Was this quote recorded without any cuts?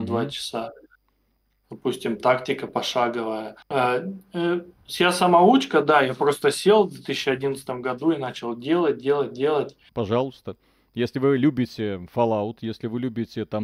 no; 2 cuts; at 3.6 s, 9.9 s

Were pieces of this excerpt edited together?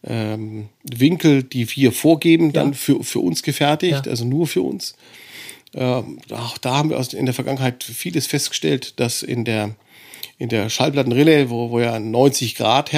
no; 0 cuts

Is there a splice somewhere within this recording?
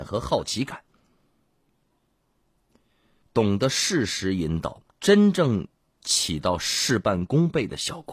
yes; 2 cuts; at 3.2 s, 4.9 s

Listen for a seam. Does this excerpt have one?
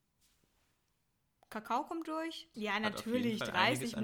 yes; 1 cut; at 2.5 s

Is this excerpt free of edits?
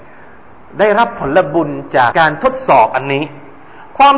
no; 1 cut; at 2.1 s

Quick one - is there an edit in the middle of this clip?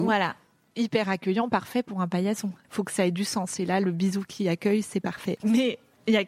yes; 2 cuts; at 2.6 s, 5.4 s

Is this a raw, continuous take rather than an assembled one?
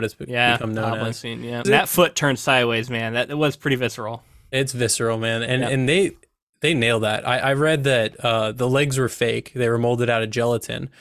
no; 1 cut; at 1.6 s

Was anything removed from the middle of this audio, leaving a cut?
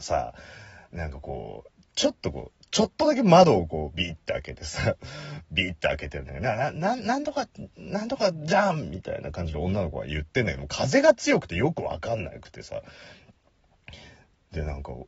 no; 0 cuts

